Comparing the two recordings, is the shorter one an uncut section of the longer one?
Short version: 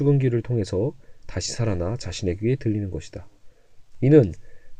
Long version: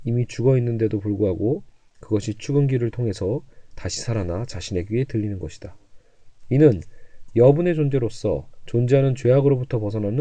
yes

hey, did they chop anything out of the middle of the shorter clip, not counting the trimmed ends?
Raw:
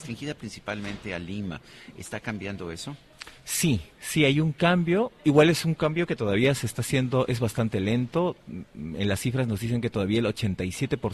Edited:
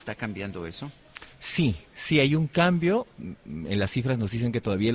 yes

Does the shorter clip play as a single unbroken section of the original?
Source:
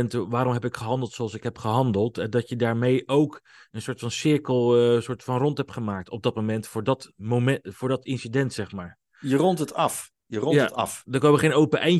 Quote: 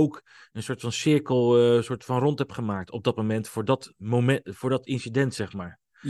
yes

